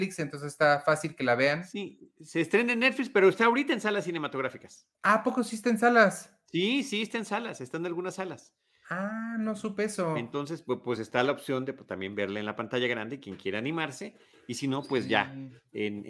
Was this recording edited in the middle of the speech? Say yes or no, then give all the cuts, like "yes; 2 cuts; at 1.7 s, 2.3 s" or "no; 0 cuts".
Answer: yes; 1 cut; at 4.9 s